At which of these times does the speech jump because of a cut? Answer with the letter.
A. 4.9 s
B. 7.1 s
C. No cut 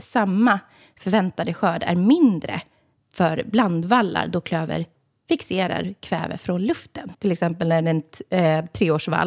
B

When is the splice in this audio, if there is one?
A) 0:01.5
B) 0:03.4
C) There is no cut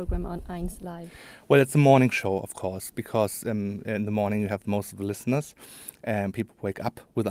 C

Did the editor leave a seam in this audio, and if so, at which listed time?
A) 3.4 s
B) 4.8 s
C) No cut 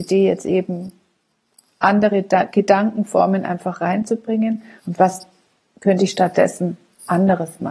B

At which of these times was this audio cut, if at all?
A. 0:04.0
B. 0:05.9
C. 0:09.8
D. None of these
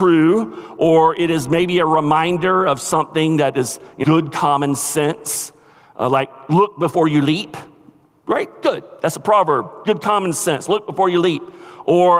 A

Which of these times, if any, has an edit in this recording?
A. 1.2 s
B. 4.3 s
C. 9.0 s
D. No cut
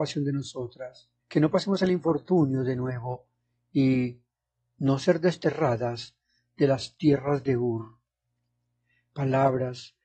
A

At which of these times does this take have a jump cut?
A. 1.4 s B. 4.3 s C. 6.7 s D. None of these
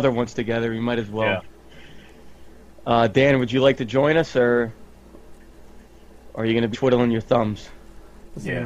C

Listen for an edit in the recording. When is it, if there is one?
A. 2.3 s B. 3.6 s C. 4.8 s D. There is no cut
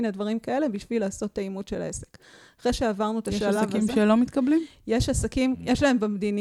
D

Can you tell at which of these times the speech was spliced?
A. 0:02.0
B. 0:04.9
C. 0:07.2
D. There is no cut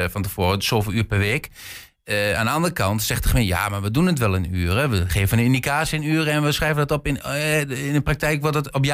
D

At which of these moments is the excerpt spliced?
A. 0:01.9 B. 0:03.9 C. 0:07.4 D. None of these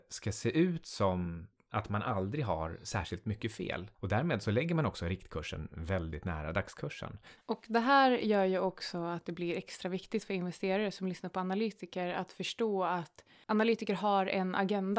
C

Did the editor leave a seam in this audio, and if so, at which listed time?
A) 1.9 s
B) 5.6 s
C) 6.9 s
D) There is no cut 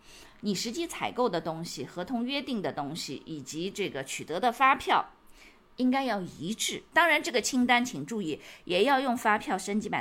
C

